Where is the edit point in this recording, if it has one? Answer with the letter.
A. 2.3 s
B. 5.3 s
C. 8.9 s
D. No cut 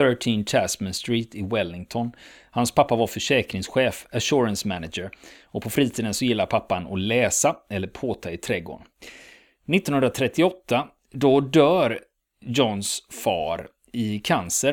D